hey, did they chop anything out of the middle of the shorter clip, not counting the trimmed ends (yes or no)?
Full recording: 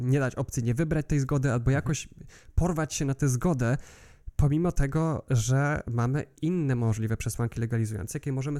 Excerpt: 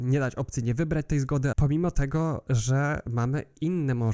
yes